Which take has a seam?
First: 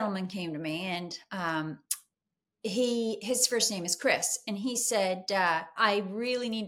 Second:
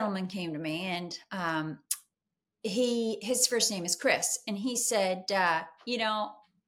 first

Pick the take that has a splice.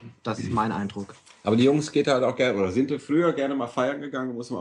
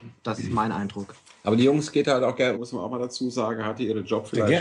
second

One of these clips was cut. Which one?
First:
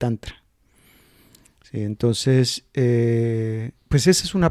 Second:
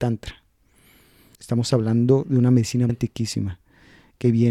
second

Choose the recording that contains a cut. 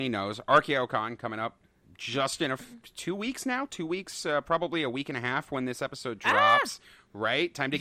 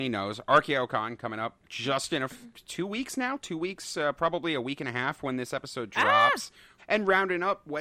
second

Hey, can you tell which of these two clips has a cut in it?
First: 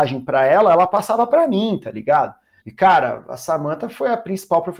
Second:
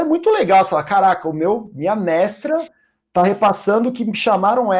first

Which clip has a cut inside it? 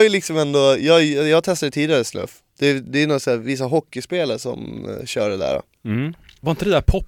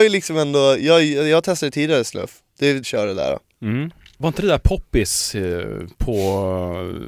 second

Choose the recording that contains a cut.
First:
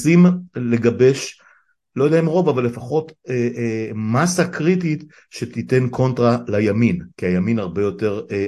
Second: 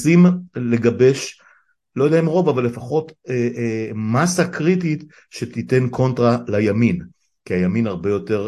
first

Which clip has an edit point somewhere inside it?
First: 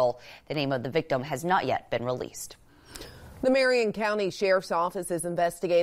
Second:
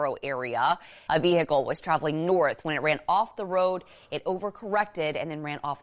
second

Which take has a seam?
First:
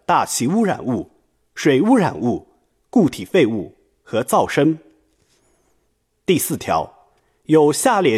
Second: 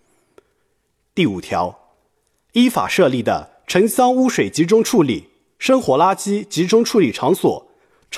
second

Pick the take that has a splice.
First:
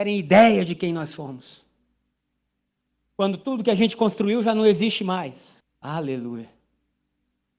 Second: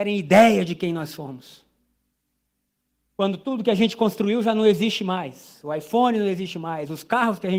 first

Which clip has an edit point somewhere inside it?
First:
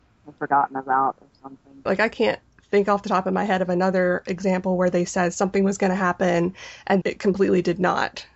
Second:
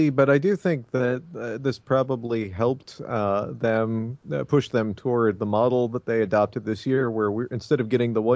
first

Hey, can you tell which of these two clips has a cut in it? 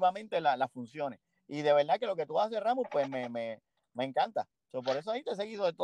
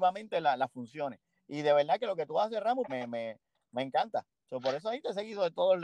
second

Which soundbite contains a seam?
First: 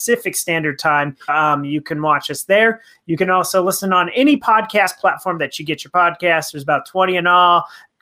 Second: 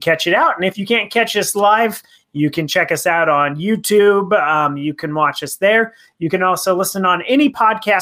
first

